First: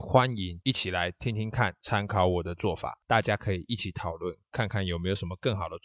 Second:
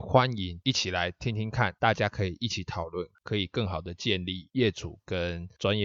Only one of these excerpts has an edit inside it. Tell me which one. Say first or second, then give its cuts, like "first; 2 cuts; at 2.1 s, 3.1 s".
second; 2 cuts; at 1.8 s, 3.1 s